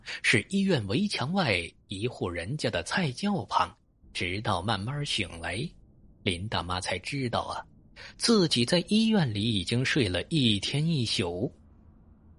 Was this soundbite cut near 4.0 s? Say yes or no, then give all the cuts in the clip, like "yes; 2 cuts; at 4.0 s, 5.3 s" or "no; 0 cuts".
yes; 1 cut; at 4.0 s